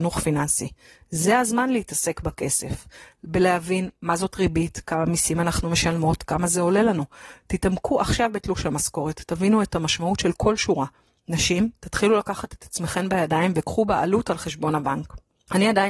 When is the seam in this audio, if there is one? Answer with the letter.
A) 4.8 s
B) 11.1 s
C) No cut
C